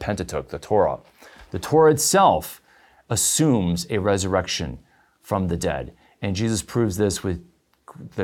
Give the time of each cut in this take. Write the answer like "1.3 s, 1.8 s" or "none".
none